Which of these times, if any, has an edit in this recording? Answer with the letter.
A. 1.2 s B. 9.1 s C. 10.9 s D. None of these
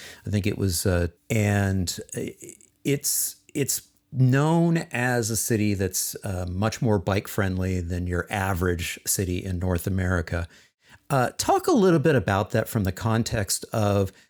A